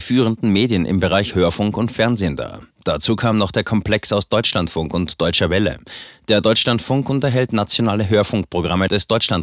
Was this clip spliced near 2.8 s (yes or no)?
no